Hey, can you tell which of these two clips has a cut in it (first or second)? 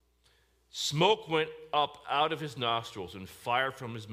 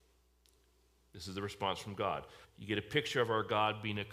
second